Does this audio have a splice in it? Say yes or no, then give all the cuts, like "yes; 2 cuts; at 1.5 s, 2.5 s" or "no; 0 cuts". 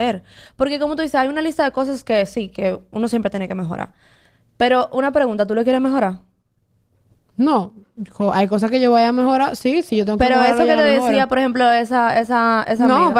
no; 0 cuts